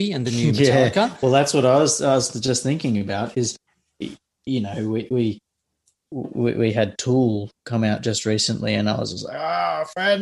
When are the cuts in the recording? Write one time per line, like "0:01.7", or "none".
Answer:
none